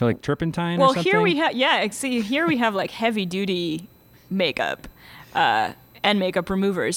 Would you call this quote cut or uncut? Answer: uncut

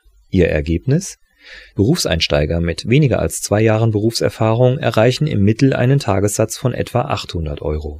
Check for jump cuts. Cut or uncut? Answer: cut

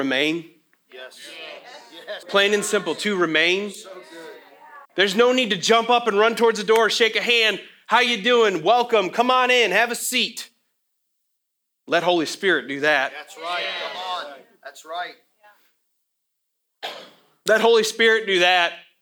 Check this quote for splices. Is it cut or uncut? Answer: cut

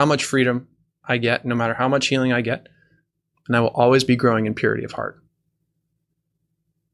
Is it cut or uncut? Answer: cut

